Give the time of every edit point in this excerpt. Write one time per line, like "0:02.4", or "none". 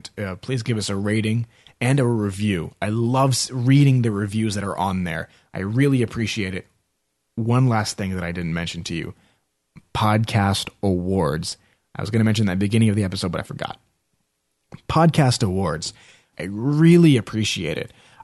0:16.3